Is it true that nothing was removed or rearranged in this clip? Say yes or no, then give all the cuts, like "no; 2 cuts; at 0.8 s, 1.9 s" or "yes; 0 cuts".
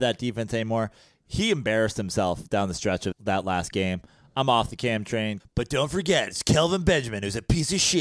no; 2 cuts; at 3.1 s, 5.4 s